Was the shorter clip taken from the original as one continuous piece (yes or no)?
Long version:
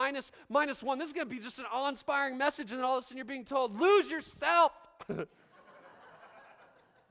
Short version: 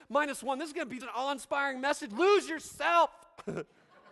no